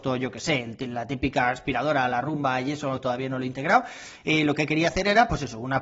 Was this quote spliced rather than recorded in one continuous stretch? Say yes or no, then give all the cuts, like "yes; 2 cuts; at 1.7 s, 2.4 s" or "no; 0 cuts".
no; 0 cuts